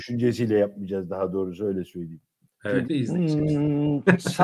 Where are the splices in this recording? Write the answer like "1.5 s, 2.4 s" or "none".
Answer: 2.8 s